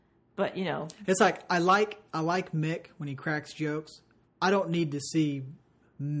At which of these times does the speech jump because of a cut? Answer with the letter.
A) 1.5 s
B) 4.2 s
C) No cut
B